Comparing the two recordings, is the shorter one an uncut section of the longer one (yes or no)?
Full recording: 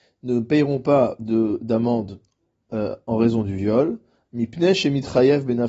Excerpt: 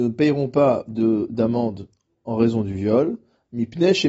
no